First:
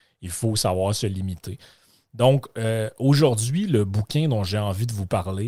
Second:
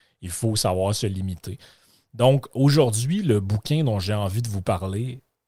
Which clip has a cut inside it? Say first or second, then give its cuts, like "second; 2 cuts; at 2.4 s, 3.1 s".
second; 1 cut; at 2.5 s